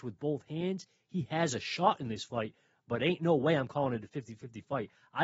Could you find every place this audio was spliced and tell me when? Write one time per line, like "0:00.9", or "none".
none